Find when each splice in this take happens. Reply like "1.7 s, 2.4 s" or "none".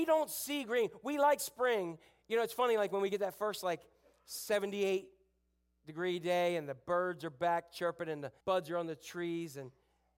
8.4 s